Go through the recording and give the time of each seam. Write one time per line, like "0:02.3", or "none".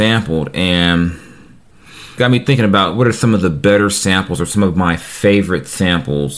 0:02.2

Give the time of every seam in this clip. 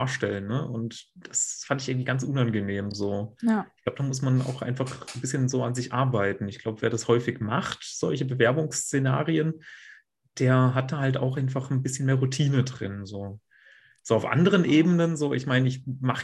none

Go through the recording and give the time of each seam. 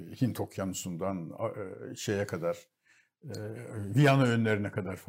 none

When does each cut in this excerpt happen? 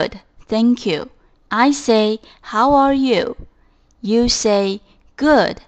0:01.4

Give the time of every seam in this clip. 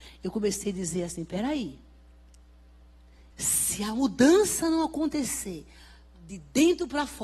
0:03.3

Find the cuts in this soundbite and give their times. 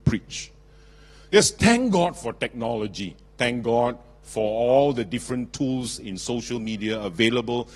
none

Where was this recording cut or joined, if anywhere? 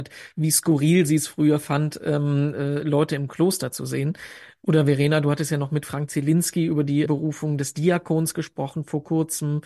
0:07.1

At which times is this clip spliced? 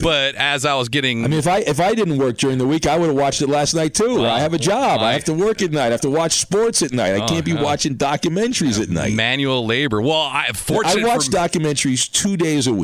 none

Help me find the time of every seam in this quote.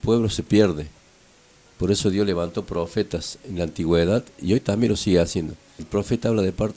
0:05.8

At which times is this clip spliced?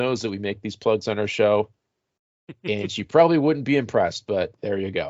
none

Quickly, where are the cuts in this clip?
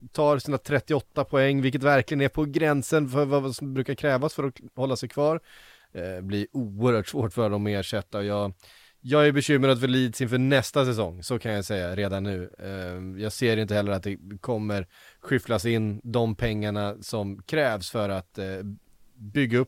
0:05.8

